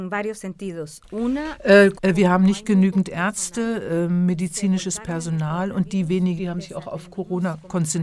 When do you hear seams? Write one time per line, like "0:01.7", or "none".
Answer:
0:02.0
0:06.4